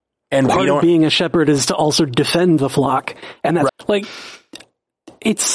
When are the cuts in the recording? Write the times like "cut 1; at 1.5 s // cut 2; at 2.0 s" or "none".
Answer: cut 1; at 3.7 s